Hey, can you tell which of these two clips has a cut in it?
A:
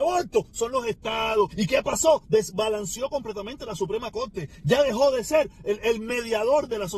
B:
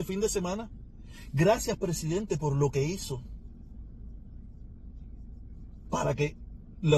A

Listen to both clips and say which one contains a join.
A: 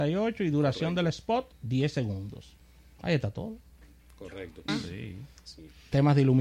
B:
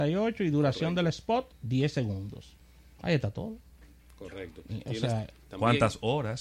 A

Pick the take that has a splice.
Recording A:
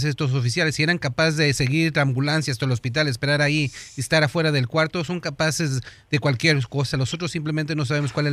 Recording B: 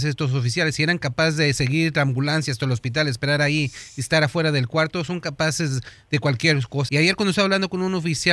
B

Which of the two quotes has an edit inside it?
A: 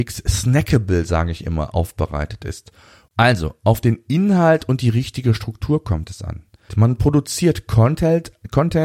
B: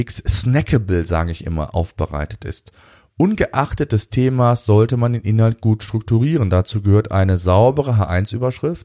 A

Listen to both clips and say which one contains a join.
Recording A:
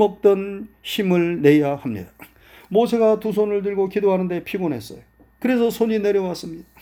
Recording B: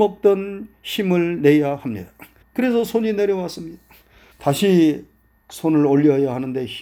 B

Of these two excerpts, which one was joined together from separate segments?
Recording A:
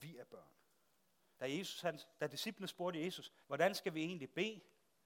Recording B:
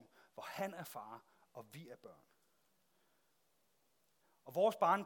A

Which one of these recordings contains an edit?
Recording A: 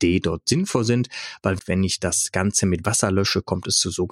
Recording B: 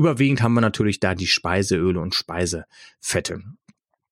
A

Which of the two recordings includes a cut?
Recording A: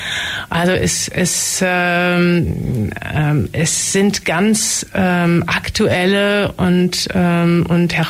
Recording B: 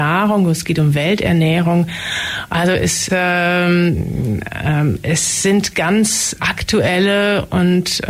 B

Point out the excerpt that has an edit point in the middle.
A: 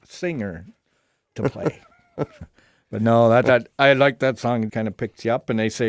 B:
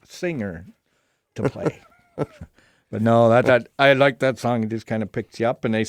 A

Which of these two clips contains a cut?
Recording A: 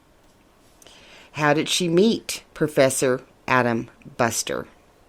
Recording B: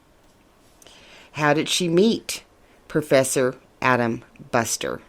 A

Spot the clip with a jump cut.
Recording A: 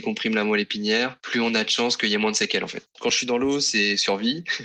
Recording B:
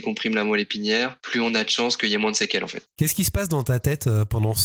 A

